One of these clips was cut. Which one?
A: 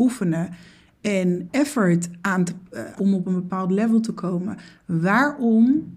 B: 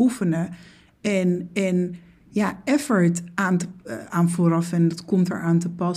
A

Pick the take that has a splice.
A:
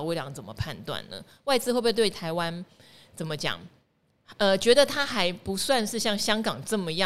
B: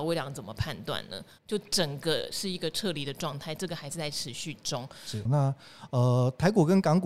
B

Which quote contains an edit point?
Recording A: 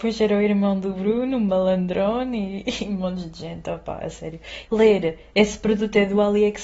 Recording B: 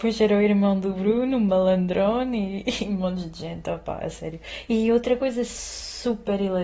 A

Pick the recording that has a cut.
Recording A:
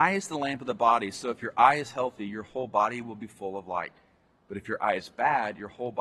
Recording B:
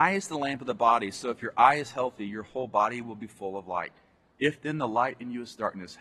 B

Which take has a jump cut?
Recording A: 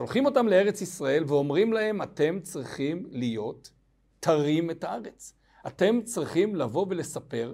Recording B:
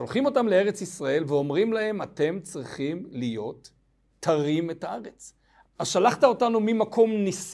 B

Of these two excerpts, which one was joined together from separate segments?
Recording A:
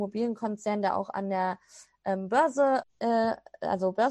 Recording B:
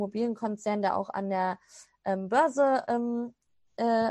A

